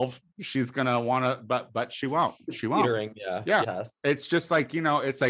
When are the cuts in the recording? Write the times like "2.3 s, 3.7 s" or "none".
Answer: 3.6 s